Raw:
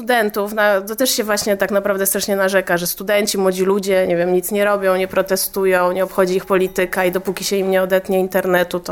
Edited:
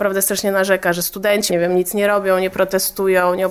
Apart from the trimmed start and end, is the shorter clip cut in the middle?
yes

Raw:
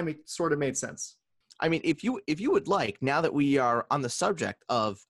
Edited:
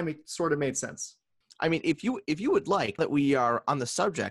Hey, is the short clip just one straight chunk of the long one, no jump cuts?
no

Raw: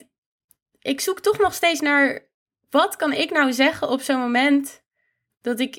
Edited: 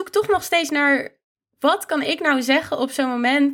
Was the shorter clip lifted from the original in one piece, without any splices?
yes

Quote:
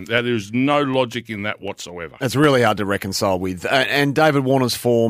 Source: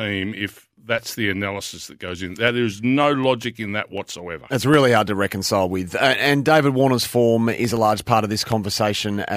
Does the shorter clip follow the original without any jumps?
yes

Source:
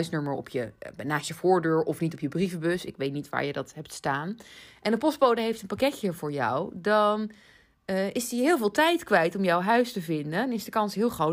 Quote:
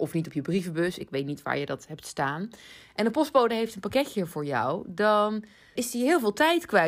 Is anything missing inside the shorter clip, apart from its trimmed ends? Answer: yes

